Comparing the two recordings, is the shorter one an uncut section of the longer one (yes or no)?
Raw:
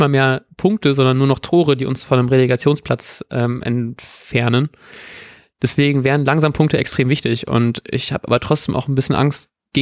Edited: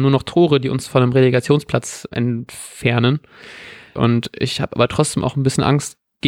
no